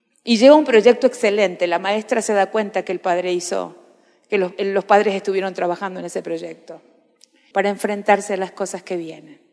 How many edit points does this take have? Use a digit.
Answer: 1